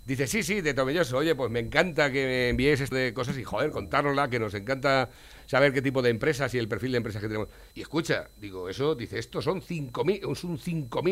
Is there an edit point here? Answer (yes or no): yes